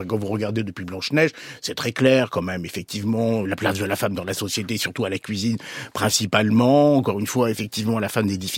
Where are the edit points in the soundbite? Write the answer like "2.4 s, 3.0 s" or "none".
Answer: 3.4 s